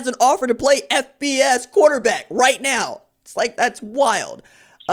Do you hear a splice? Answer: yes; 1 cut; at 3.6 s

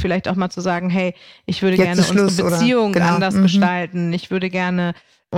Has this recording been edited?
no; 0 cuts

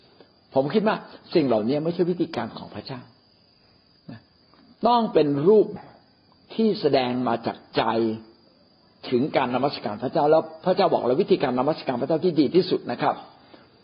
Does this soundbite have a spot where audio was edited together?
yes; 1 cut; at 5.8 s

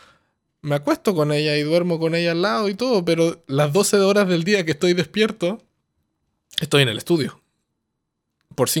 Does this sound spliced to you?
no; 0 cuts

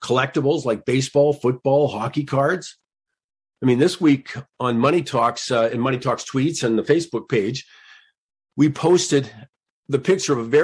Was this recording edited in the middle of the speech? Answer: no; 0 cuts

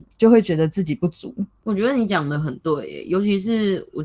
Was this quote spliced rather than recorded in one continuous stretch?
yes; 1 cut; at 1.6 s

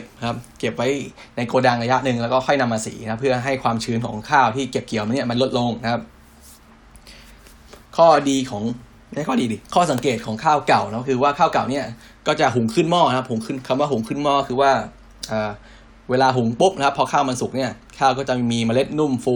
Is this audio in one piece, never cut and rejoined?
no; 2 cuts; at 7.9 s, 9.6 s

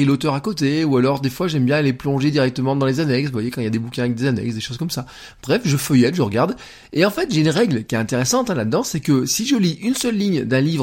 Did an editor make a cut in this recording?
no; 0 cuts

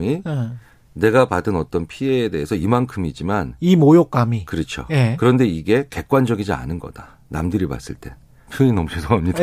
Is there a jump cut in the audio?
yes; 1 cut; at 8.5 s

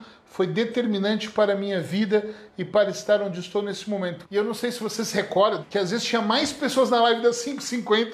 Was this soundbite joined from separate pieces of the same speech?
yes; 2 cuts; at 4.2 s, 5.6 s

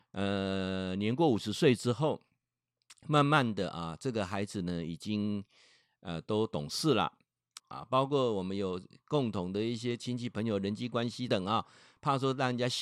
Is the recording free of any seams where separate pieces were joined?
no; 2 cuts; at 7.6 s, 11.3 s

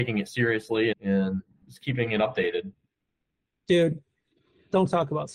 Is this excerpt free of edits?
no; 1 cut; at 0.9 s

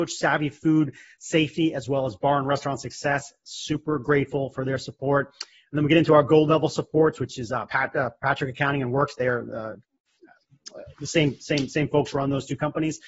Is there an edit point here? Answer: no; 0 cuts

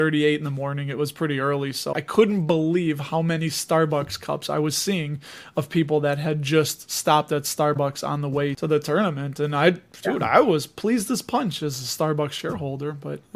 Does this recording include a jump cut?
yes; 1 cut; at 1.9 s

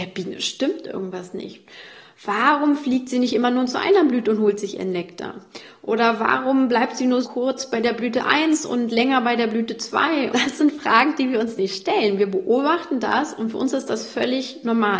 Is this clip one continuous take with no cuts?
no; 2 cuts; at 7.2 s, 10.3 s

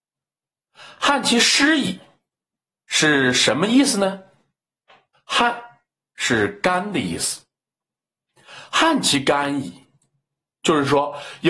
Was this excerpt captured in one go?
no; 1 cut; at 5.1 s

